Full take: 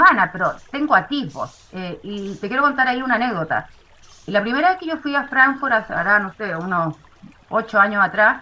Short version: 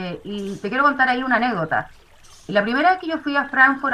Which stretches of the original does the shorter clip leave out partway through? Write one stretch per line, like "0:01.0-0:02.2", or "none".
none